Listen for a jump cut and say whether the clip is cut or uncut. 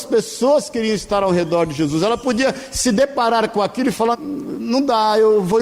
cut